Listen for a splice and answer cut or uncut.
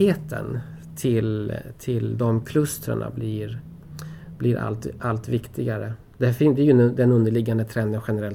uncut